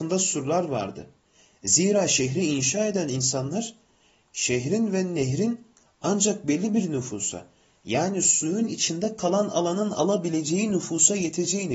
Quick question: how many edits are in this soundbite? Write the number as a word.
zero